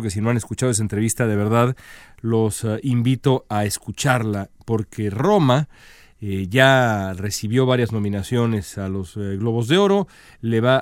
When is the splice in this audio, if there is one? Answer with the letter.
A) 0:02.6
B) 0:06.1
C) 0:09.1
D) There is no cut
D